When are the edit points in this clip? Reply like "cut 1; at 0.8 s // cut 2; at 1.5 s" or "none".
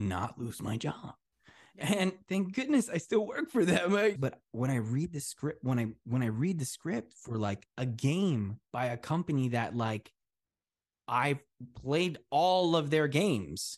cut 1; at 4.2 s